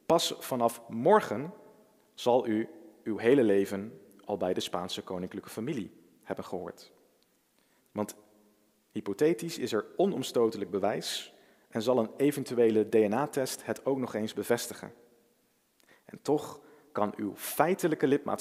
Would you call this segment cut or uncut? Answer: cut